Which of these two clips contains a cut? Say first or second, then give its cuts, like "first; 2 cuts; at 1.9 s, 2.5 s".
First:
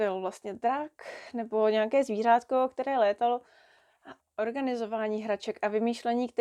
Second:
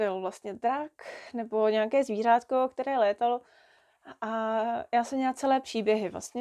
first; 1 cut; at 4.2 s